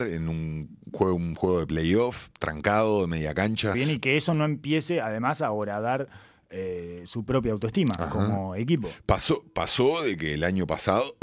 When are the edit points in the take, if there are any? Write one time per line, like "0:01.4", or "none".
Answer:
0:03.7